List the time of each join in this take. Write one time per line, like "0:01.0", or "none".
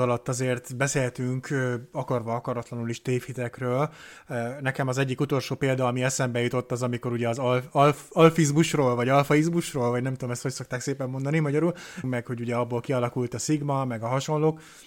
0:12.0